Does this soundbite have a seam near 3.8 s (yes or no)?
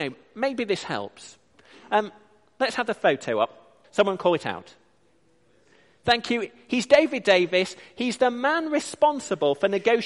yes